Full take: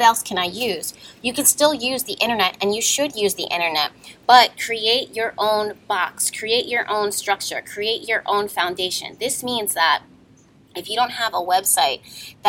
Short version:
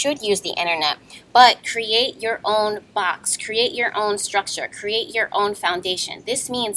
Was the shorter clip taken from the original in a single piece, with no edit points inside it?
yes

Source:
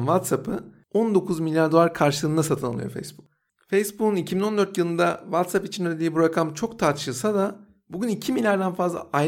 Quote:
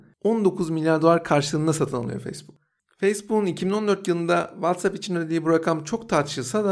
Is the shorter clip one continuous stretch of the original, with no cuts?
yes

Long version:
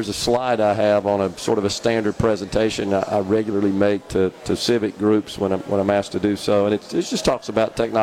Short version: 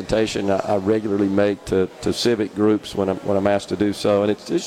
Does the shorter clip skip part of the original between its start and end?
no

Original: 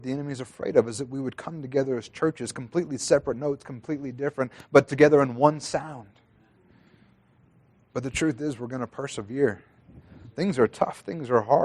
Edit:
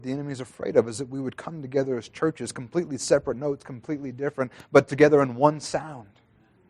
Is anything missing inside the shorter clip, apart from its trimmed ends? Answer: no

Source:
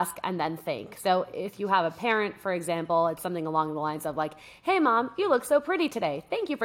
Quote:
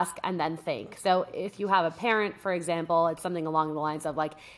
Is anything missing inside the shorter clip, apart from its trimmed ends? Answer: no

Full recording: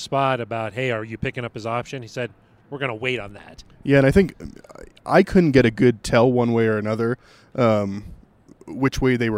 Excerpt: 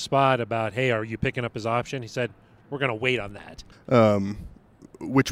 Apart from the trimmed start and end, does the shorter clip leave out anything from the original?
yes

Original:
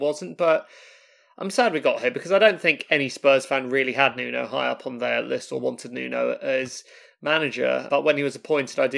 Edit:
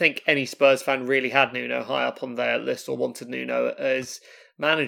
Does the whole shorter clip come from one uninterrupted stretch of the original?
yes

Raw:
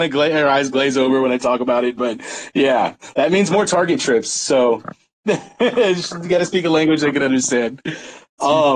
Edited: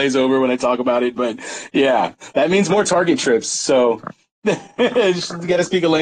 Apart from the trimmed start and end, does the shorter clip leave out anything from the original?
no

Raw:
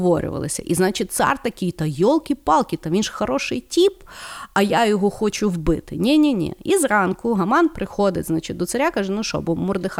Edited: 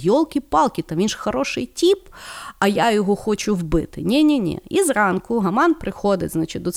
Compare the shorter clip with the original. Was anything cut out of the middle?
no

